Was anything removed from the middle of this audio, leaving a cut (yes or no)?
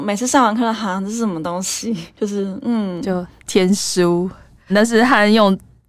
yes